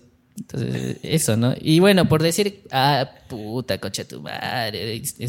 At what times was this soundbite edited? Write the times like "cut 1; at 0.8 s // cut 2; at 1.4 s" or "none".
none